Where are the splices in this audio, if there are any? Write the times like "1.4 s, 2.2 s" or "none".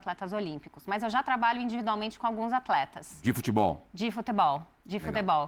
none